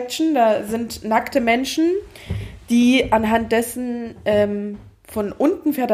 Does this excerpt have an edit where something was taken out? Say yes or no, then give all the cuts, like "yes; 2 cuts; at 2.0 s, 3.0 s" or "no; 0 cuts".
no; 0 cuts